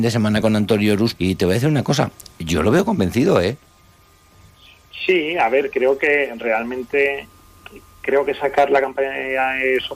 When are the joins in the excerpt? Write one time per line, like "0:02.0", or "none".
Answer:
0:01.2